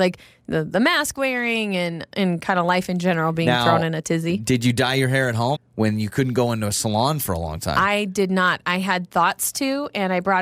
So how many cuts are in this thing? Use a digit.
1